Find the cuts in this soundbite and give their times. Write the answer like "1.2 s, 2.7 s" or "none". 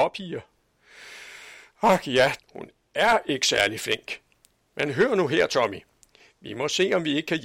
2.4 s